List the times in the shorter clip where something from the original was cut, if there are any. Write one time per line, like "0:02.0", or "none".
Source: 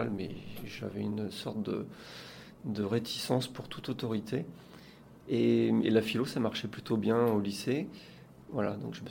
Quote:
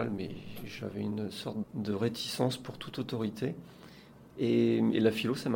0:01.6

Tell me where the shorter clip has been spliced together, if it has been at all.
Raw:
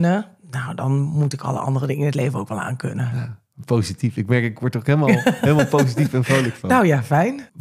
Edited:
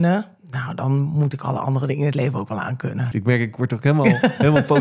0:03.1

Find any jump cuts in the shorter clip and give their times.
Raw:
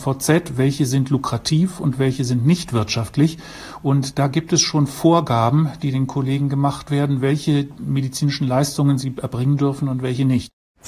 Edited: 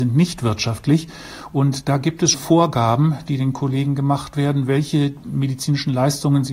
0:02.3

